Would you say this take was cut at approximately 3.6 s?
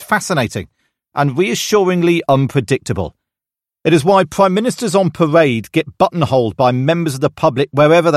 no; 0 cuts

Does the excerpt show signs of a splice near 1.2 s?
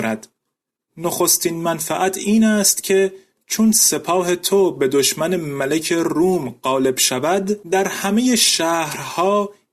no; 1 cut; at 7.6 s

